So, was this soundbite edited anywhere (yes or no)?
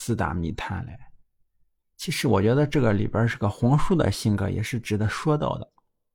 no